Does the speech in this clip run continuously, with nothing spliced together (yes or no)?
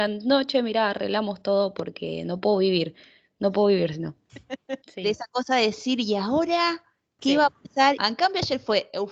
no